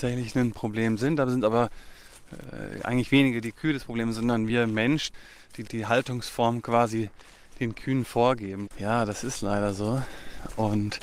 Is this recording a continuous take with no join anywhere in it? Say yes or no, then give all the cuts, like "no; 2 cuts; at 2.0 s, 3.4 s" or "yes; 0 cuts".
no; 1 cut; at 8.7 s